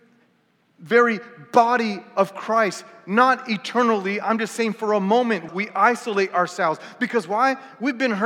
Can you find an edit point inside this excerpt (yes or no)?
yes